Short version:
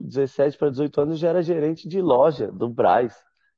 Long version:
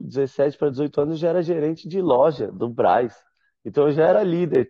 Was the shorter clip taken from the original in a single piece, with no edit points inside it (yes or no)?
yes